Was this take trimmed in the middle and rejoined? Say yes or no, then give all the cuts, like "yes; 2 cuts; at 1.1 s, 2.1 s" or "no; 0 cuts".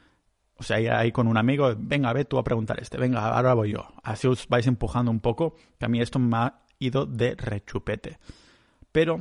no; 0 cuts